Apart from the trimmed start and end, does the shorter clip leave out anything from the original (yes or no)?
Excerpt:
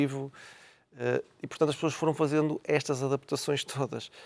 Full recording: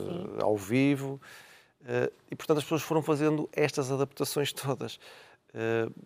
no